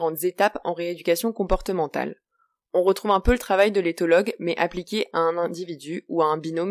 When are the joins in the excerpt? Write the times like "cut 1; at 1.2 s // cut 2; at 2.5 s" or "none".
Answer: none